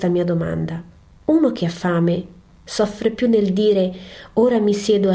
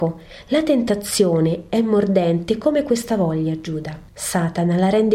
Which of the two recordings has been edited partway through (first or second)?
second